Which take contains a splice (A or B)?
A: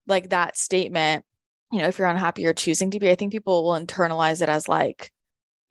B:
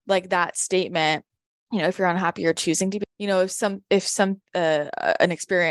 B